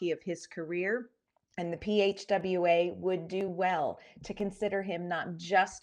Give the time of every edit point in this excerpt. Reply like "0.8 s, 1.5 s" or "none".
none